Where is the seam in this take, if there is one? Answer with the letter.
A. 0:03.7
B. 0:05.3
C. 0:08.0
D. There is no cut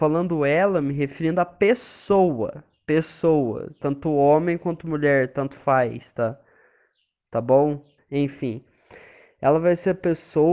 C